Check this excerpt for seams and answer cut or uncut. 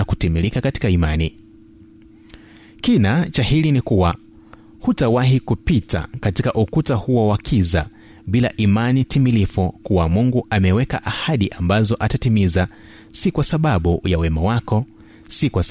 uncut